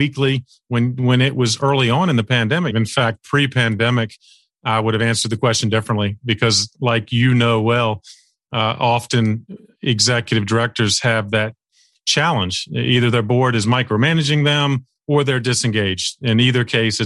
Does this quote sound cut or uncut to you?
cut